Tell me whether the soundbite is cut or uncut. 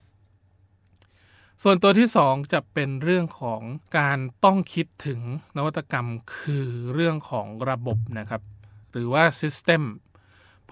cut